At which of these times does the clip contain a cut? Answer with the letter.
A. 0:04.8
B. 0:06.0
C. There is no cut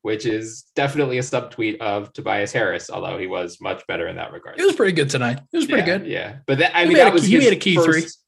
C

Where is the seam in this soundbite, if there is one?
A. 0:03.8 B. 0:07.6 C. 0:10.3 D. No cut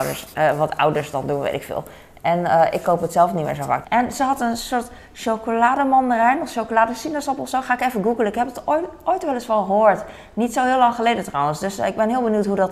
A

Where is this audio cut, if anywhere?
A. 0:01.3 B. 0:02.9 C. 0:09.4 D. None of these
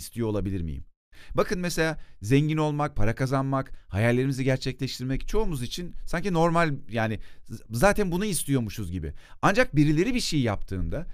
D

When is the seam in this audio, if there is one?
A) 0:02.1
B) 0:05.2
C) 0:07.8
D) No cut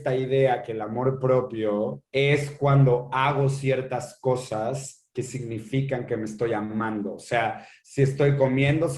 A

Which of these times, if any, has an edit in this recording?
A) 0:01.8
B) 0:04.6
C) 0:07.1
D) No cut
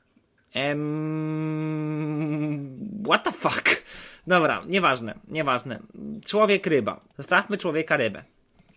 C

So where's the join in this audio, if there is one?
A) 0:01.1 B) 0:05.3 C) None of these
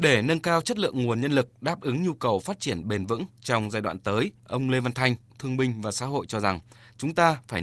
B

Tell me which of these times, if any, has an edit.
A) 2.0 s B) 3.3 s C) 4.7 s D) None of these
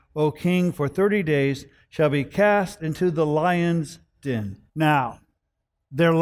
C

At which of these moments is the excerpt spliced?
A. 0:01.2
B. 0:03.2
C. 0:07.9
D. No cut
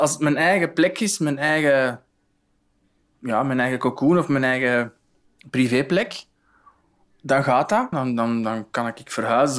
C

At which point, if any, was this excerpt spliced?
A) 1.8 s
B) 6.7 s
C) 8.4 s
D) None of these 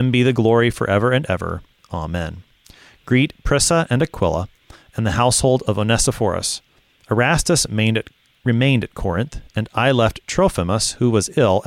D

